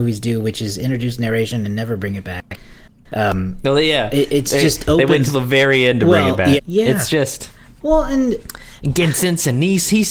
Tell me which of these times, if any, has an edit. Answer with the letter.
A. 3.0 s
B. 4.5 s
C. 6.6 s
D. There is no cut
C